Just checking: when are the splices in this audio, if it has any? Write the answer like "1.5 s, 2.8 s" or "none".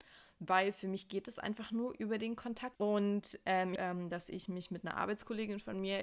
2.8 s, 3.8 s